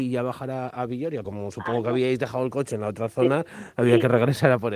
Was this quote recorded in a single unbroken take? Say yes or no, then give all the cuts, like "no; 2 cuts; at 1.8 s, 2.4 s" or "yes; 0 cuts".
no; 1 cut; at 1.2 s